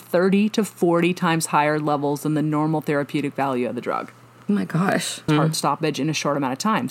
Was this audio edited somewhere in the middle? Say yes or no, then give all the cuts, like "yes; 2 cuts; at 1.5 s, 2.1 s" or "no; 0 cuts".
yes; 1 cut; at 5.3 s